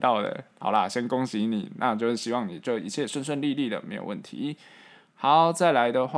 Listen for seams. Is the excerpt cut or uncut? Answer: uncut